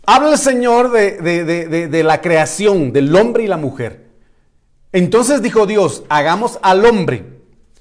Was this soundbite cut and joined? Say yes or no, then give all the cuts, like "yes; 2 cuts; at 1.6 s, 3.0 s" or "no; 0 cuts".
no; 0 cuts